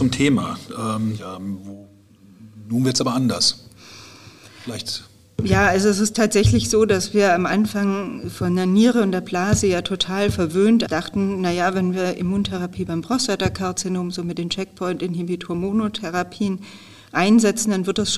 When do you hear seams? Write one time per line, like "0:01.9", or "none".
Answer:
0:01.2
0:10.9